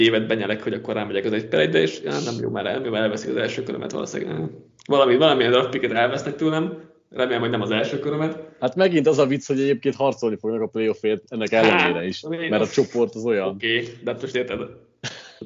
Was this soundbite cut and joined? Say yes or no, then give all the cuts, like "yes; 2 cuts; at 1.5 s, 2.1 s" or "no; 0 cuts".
yes; 1 cut; at 8.6 s